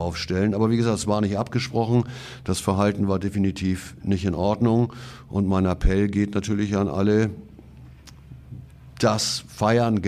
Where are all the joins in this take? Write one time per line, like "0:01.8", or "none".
none